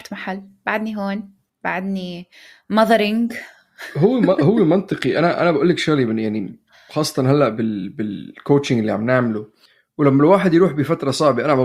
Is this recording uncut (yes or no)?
yes